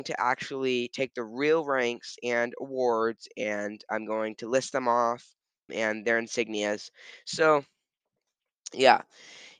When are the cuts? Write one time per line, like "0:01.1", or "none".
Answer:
0:05.7